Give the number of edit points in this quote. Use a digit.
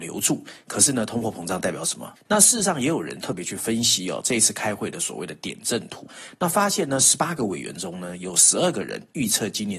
1